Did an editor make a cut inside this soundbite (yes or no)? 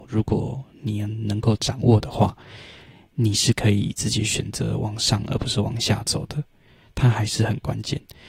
no